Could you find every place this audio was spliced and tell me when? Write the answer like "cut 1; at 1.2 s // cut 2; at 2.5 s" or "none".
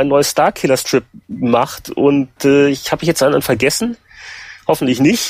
none